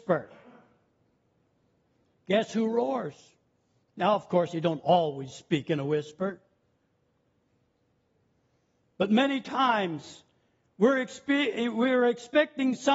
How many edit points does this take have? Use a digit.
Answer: 1